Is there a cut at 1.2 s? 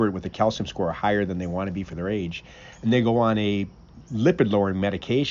no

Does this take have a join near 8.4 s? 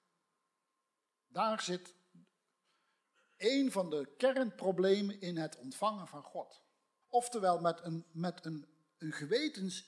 no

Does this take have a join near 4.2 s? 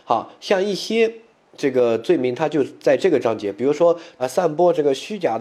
yes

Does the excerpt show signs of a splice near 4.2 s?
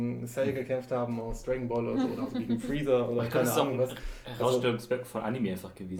no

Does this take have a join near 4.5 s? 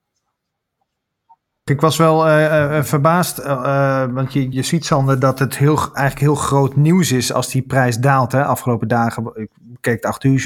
yes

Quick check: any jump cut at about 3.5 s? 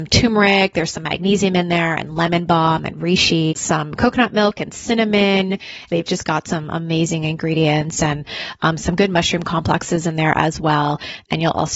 yes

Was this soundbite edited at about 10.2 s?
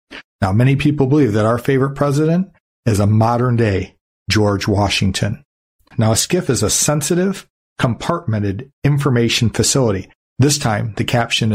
yes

